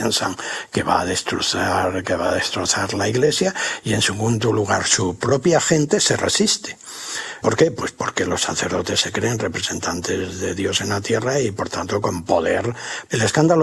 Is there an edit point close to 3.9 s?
no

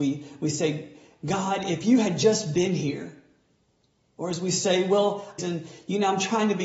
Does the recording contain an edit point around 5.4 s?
yes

